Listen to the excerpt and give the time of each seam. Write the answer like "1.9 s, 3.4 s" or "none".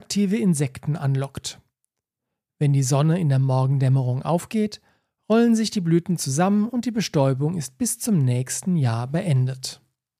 none